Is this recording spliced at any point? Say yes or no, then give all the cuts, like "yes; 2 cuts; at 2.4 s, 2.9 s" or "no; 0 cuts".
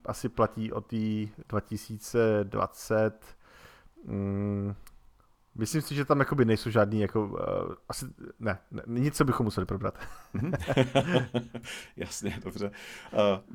no; 0 cuts